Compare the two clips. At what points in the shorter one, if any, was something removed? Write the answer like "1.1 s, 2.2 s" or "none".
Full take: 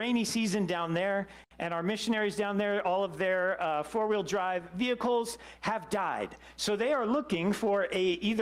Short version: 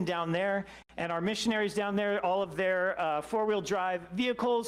none